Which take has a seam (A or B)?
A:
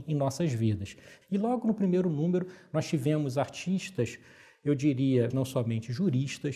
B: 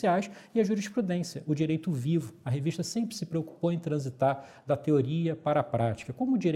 A